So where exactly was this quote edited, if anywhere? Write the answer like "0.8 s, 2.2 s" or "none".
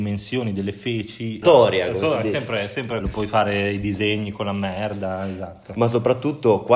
1.4 s, 3.0 s